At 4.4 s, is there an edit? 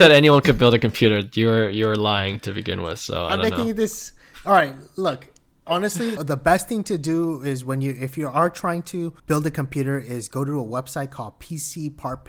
no; 2 cuts; at 6.2 s, 9.2 s

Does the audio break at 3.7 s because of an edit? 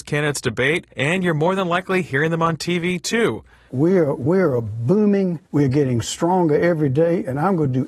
yes; 2 cuts; at 3.7 s, 5.5 s

